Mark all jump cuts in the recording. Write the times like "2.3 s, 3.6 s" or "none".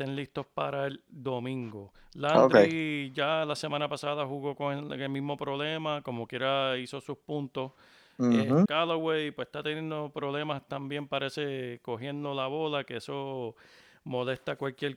8.7 s